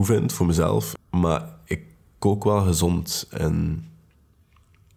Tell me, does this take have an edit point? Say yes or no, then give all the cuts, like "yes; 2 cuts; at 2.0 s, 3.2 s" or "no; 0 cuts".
yes; 1 cut; at 1.0 s